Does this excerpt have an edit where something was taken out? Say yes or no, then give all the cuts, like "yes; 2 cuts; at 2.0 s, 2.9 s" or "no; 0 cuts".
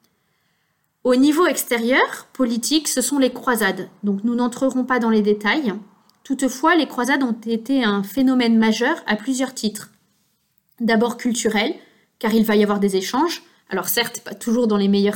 no; 0 cuts